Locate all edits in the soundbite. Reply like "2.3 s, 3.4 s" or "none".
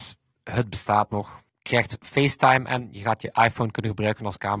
1.5 s